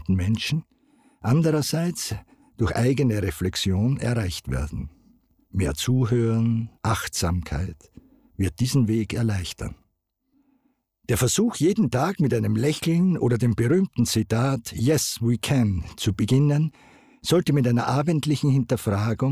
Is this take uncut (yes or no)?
no